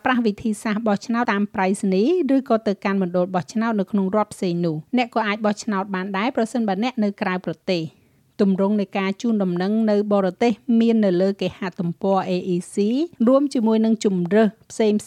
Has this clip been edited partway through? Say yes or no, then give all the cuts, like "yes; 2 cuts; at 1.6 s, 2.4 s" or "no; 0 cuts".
yes; 3 cuts; at 1.3 s, 4.9 s, 13.2 s